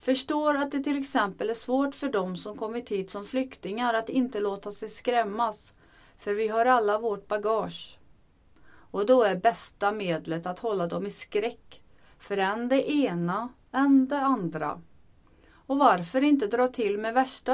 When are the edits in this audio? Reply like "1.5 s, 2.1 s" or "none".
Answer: 8.5 s